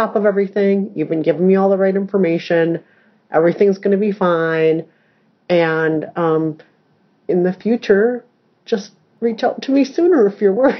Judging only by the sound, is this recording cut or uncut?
uncut